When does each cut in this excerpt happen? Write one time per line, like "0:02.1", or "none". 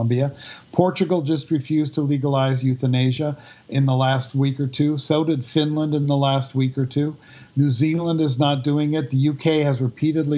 none